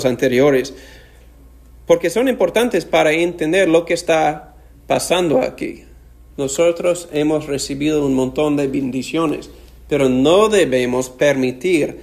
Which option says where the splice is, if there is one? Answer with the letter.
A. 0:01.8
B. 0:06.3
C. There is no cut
B